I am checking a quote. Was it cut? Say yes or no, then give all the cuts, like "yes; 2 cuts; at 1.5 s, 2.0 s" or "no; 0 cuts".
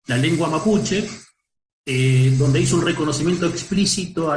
no; 0 cuts